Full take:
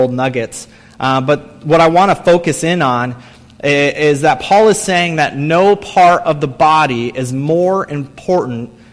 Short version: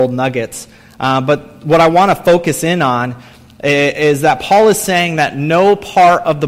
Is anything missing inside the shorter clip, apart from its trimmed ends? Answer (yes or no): no